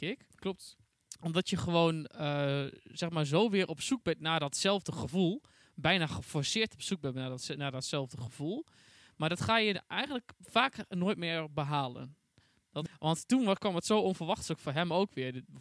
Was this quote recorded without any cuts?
no; 1 cut; at 12.9 s

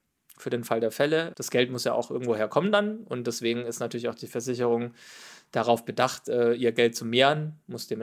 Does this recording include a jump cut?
no; 0 cuts

